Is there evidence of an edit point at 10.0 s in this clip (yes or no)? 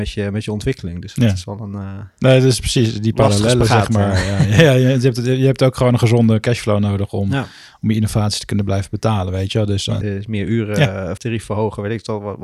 yes